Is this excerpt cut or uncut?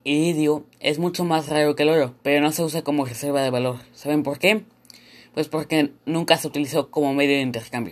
cut